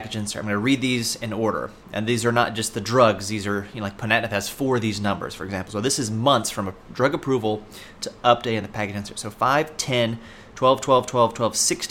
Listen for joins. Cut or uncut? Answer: uncut